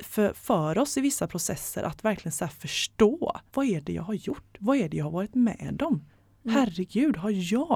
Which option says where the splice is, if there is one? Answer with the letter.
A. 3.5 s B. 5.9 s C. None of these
A